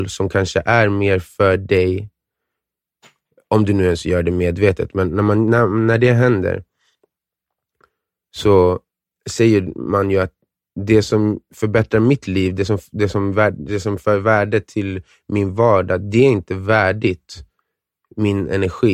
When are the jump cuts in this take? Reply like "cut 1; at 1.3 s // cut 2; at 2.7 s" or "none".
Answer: none